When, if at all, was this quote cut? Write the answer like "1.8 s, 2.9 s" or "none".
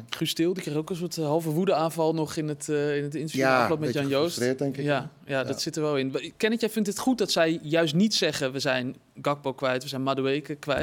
none